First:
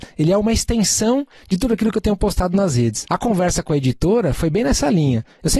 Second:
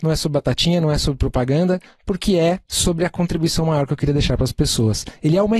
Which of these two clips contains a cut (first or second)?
first